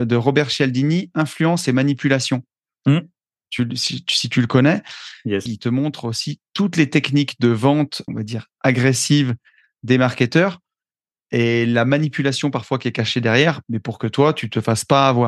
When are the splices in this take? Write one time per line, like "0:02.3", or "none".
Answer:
0:05.5
0:08.1
0:13.6